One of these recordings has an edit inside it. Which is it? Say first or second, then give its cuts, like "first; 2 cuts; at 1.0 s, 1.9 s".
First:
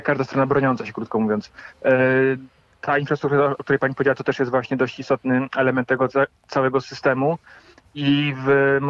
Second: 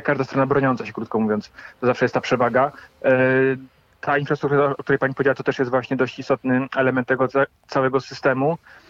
first; 1 cut; at 1.7 s